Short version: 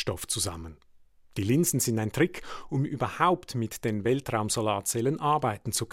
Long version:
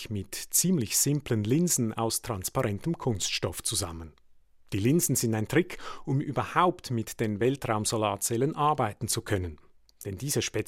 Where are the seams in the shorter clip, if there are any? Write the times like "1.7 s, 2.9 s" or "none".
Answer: none